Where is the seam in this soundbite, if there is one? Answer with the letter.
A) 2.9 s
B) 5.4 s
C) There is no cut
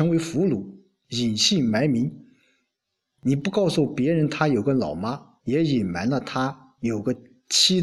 B